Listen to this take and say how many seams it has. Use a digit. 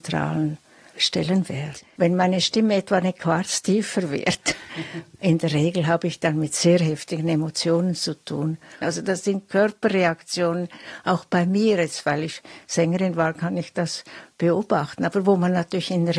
2